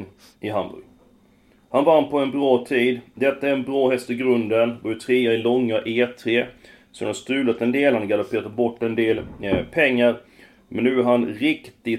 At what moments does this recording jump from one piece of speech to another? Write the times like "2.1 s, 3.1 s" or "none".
none